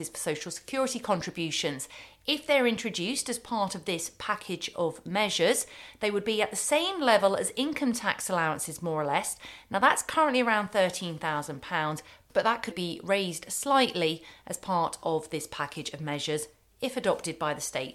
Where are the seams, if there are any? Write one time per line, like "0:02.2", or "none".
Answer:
0:12.7